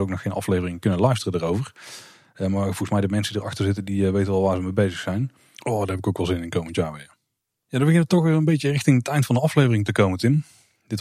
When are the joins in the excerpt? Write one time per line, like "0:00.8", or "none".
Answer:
0:05.6